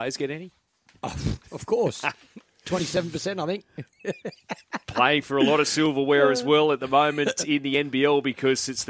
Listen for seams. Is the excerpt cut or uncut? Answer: uncut